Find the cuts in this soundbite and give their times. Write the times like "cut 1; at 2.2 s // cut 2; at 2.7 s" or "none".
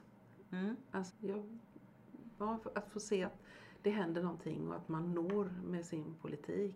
cut 1; at 1.1 s

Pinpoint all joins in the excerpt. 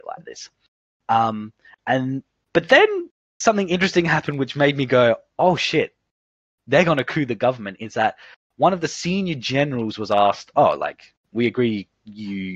none

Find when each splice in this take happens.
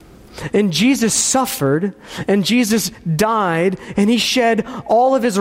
none

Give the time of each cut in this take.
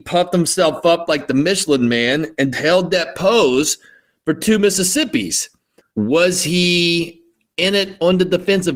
cut 1; at 2.5 s // cut 2; at 5.8 s

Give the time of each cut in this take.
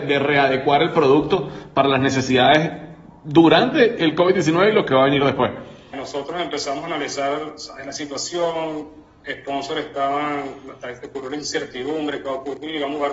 cut 1; at 5.9 s

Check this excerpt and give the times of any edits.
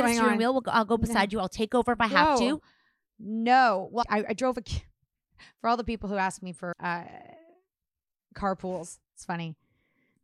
cut 1; at 4.0 s // cut 2; at 6.7 s

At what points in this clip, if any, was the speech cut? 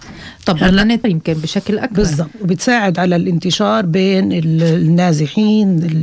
cut 1; at 1.0 s

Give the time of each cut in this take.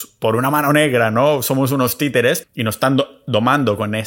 cut 1; at 2.4 s

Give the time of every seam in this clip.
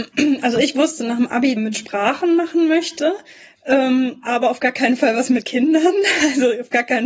cut 1; at 1.6 s

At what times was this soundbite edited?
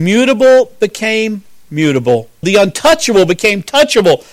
cut 1; at 2.4 s

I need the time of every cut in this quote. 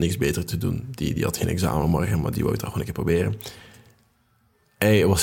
none

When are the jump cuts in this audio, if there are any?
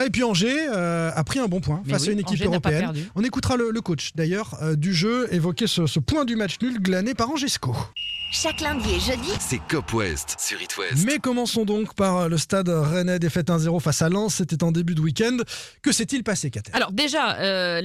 none

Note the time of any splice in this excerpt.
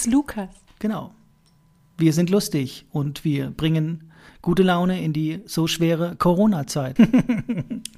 cut 1; at 7.0 s

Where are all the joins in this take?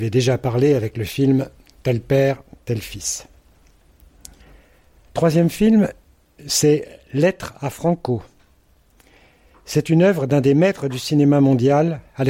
none

